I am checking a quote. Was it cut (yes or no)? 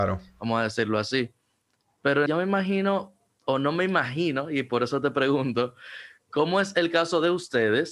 yes